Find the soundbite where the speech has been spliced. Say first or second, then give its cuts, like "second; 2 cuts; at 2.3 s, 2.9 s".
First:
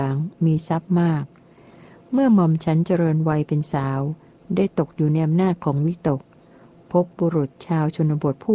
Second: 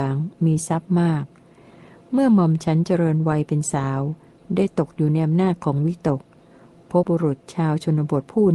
second; 1 cut; at 7.0 s